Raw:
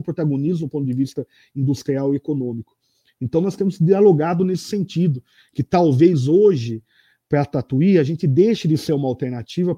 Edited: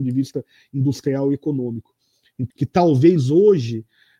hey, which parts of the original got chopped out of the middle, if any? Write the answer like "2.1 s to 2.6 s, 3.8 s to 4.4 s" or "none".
3.3 s to 5.5 s